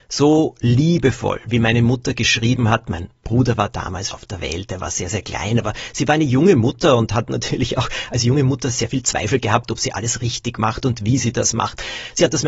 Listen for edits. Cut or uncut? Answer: cut